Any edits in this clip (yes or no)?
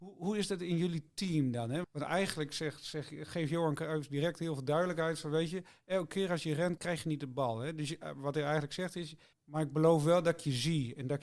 yes